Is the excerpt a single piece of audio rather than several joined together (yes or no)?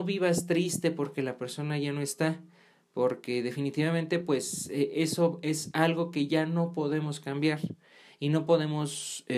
yes